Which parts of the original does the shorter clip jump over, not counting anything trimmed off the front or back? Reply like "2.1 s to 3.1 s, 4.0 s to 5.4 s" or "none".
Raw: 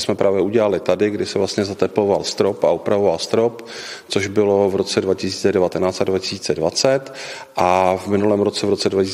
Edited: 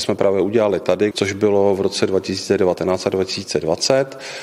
1.1 s to 4.1 s